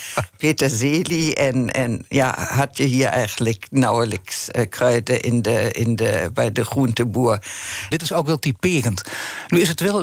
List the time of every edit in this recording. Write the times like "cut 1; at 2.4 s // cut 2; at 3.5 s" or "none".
cut 1; at 7.9 s